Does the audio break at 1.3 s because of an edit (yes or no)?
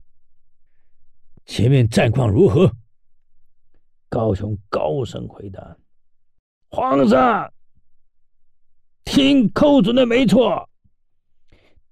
yes